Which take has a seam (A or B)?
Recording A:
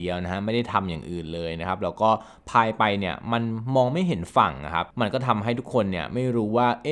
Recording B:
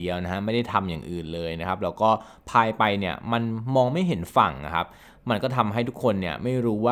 A